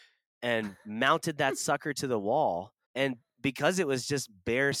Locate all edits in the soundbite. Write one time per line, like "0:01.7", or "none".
0:02.8